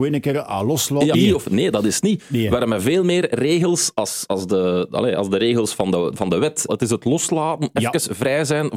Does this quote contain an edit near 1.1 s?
yes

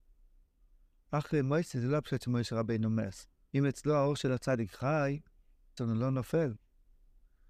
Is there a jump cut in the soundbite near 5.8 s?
yes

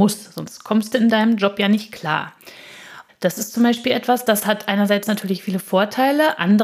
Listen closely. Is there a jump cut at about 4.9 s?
no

